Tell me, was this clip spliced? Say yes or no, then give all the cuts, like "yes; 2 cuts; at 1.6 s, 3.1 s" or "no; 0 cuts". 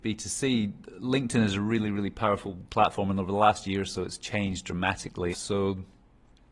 yes; 1 cut; at 5.3 s